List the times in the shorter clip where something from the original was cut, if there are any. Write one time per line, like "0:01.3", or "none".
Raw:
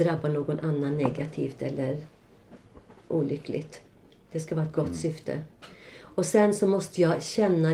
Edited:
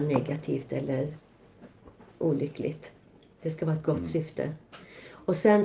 none